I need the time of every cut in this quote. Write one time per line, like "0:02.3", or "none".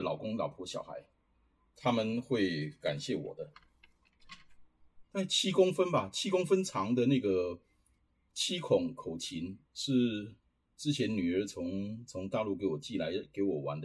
0:05.0
0:09.7